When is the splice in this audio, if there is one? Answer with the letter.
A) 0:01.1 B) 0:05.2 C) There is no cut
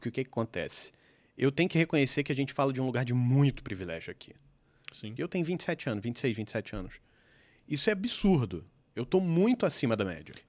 B